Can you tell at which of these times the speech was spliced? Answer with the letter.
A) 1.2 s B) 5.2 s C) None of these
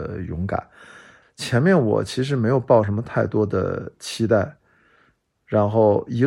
A